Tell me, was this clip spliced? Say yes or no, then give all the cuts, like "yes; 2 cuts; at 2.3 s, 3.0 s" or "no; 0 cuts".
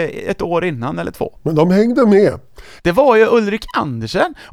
yes; 2 cuts; at 1.4 s, 2.8 s